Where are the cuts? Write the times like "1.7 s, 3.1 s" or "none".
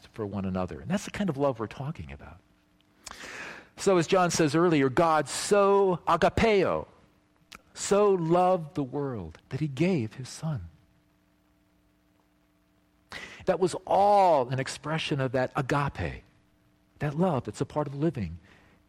9.4 s, 13.4 s